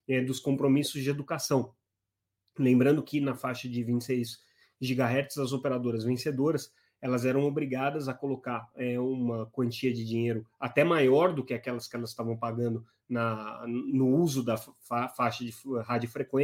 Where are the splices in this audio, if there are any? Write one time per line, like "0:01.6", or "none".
none